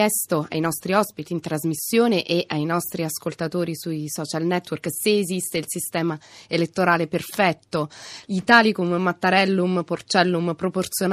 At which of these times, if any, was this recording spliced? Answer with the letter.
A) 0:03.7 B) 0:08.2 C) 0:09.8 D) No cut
B